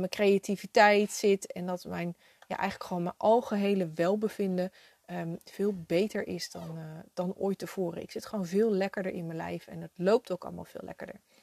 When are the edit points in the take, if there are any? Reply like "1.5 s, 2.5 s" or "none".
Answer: none